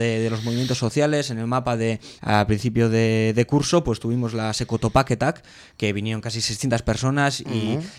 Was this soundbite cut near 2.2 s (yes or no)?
yes